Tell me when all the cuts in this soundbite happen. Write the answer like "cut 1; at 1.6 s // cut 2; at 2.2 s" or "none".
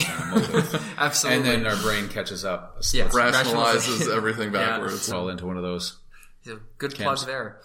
cut 1; at 3.1 s // cut 2; at 5.1 s